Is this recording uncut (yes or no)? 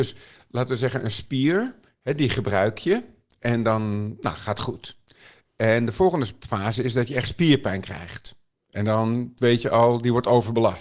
yes